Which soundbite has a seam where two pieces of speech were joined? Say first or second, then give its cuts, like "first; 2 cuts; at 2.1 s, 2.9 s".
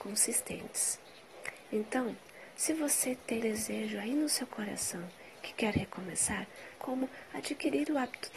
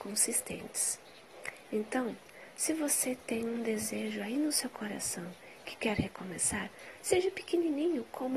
first; 2 cuts; at 3.4 s, 6.8 s